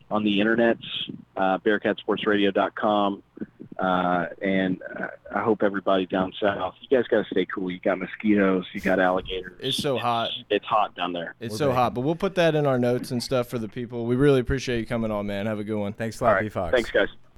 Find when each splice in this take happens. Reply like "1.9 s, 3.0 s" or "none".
11.4 s